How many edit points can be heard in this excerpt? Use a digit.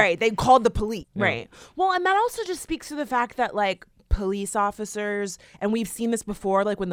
1